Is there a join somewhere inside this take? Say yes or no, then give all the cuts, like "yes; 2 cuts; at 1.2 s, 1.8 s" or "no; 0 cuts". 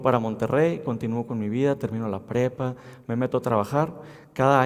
no; 0 cuts